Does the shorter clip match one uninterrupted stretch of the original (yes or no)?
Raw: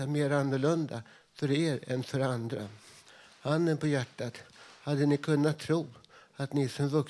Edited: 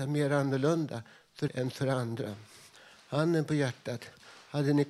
no